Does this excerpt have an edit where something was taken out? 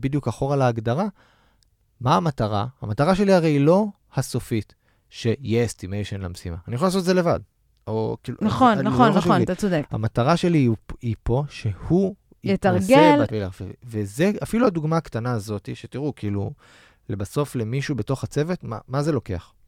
yes; 1 cut; at 13.3 s

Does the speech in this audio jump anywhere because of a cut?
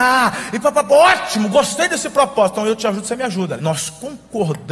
yes; 1 cut; at 3.6 s

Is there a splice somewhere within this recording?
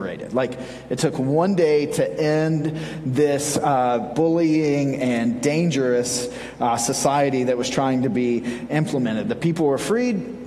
yes; 1 cut; at 4.1 s

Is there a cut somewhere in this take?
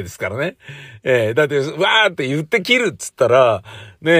no; 0 cuts

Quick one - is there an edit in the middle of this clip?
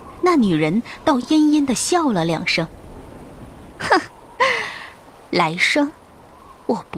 no; 0 cuts

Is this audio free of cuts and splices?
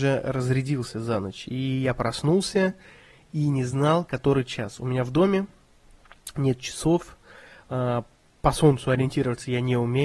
yes; 0 cuts

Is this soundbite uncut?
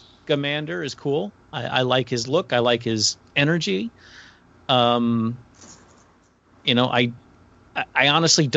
yes; 0 cuts

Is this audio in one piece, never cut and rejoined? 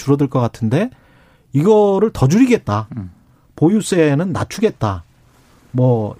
yes; 0 cuts

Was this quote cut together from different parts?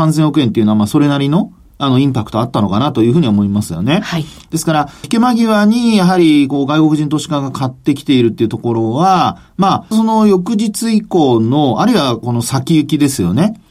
yes; 3 cuts; at 5.0 s, 9.9 s, 12.2 s

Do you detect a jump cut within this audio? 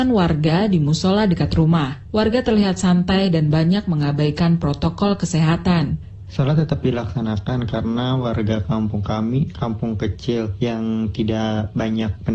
yes; 1 cut; at 6.2 s

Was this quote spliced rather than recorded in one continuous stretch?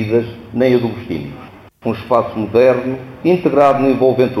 yes; 2 cuts; at 1.7 s, 3.2 s

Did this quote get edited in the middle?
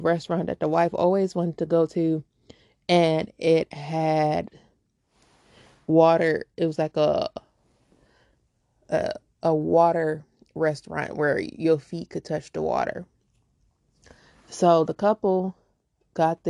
no; 0 cuts

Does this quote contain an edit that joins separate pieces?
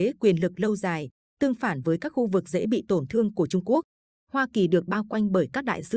yes; 1 cut; at 4.1 s

